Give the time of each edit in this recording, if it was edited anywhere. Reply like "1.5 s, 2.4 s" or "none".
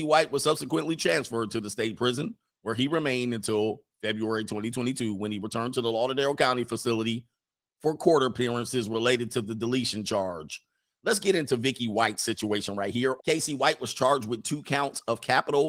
13.2 s

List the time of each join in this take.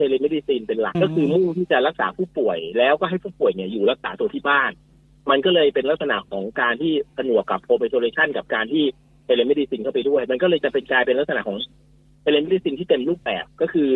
0.9 s

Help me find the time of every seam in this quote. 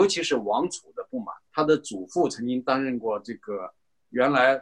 1.5 s

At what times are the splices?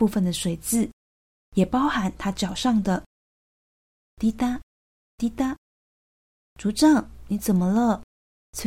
4.1 s

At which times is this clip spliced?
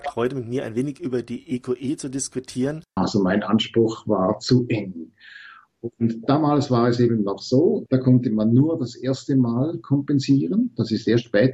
3.0 s, 7.9 s

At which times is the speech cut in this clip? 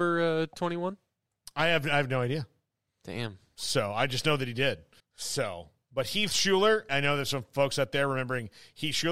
5.0 s, 6.9 s

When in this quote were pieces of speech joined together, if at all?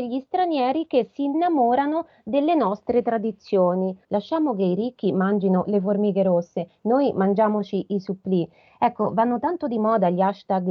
4.0 s

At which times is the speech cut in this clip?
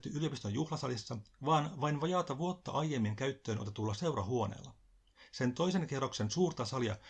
none

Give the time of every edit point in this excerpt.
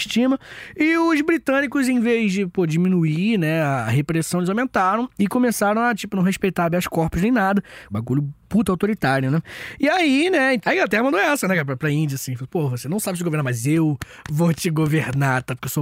7.9 s, 10.6 s

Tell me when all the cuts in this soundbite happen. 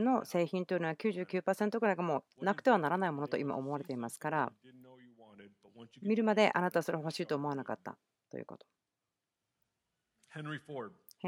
none

